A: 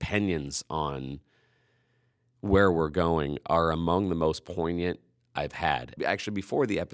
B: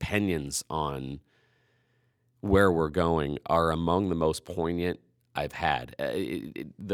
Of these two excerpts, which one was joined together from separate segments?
A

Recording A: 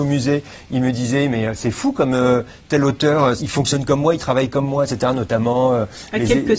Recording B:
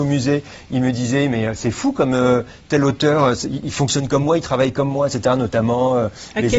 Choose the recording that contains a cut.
A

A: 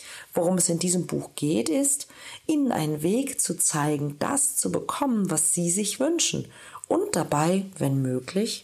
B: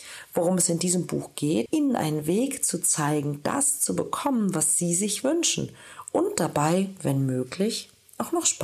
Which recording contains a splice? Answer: B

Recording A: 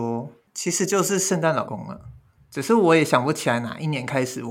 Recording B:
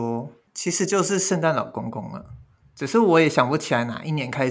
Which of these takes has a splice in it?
A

